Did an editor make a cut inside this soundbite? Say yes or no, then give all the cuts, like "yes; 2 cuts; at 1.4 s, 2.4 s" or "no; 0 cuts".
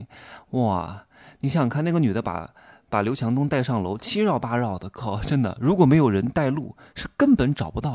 no; 0 cuts